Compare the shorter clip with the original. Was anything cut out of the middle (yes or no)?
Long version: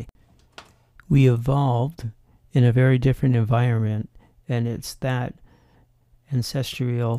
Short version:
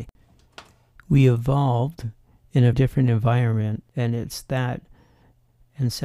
yes